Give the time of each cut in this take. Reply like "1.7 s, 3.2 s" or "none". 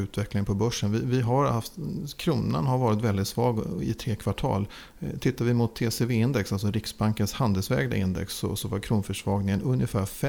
none